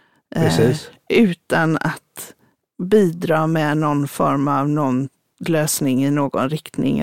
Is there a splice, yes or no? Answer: no